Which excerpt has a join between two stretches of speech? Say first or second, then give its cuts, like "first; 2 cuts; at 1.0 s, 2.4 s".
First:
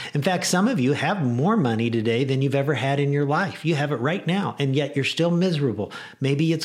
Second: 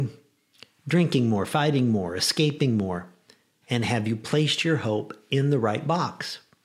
second; 1 cut; at 3.6 s